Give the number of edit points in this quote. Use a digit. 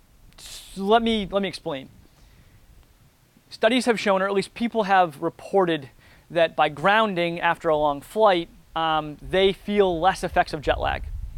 0